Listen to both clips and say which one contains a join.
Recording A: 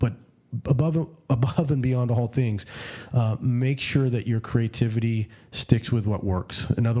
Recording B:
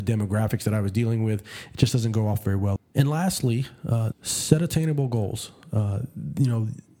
B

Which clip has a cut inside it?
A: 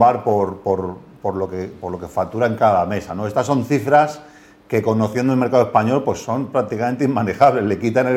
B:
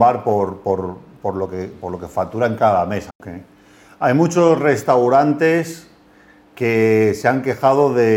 B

